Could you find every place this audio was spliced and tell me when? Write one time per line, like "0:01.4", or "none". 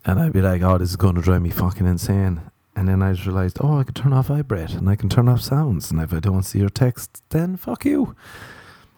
none